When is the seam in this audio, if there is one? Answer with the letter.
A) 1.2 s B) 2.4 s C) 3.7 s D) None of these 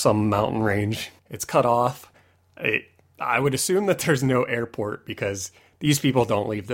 A